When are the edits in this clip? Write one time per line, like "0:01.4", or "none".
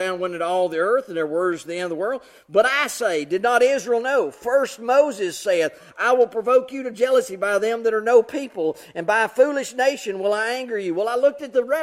none